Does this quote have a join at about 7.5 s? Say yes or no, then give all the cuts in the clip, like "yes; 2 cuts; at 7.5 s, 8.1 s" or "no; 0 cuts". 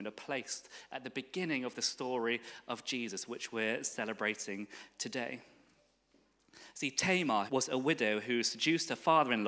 yes; 1 cut; at 7.5 s